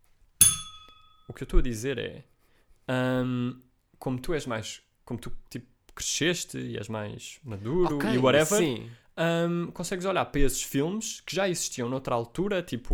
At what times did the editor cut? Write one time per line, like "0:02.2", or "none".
none